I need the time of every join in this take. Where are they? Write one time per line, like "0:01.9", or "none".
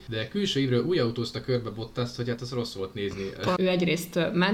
0:03.6